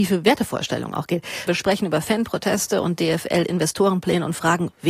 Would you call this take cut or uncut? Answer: cut